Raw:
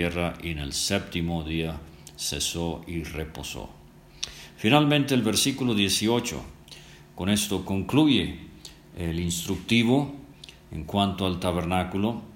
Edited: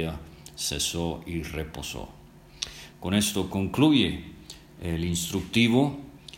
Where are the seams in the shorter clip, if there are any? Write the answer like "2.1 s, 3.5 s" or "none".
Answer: 2.9 s